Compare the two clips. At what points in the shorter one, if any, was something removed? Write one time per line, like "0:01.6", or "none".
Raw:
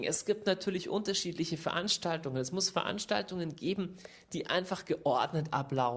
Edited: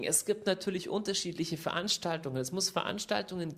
none